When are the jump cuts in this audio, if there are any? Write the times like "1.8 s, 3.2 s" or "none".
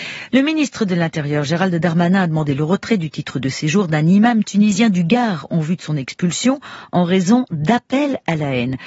none